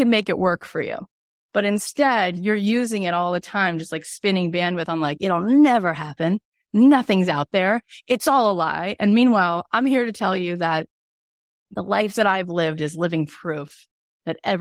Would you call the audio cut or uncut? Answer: uncut